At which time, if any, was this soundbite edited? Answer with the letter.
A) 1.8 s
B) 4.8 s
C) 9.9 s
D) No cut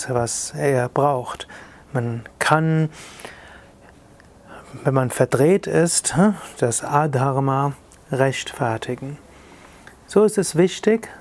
D